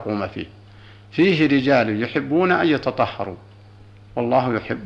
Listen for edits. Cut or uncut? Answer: uncut